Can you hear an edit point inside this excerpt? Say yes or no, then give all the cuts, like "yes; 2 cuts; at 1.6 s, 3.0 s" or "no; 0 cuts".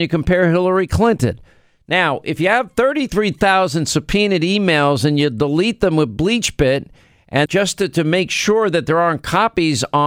yes; 1 cut; at 7.5 s